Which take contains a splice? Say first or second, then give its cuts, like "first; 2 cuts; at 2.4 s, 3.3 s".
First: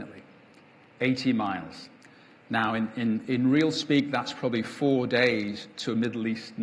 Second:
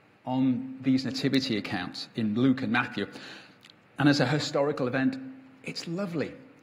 first; 1 cut; at 3.2 s